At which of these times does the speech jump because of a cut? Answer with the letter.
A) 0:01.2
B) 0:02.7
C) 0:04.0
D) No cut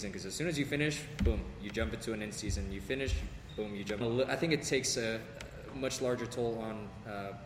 C